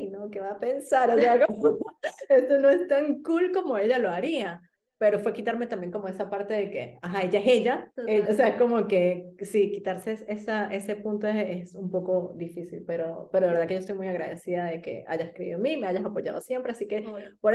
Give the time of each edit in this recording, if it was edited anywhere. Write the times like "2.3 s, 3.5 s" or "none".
8.2 s